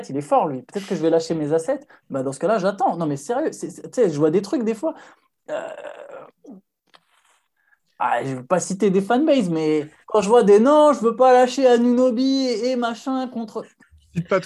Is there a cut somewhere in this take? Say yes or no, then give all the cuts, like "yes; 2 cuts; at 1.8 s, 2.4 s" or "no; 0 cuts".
yes; 1 cut; at 10.0 s